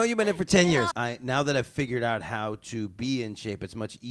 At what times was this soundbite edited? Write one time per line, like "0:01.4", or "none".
0:00.9